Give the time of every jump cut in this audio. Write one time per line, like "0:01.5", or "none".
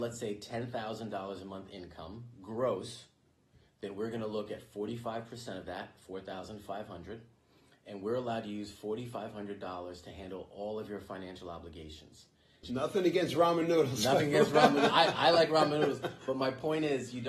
0:12.6